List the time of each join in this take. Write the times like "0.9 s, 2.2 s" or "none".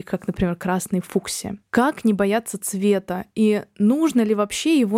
none